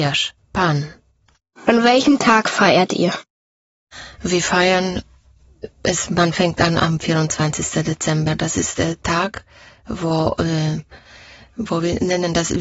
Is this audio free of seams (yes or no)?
yes